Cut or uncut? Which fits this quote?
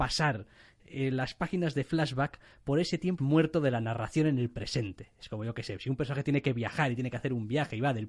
cut